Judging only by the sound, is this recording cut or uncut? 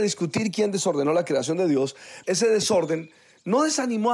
cut